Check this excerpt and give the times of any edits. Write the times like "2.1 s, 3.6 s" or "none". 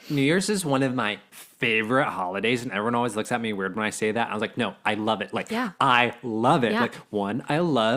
none